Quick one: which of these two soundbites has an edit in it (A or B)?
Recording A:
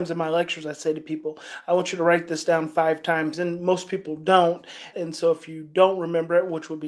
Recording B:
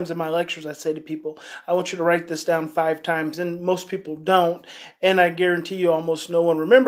A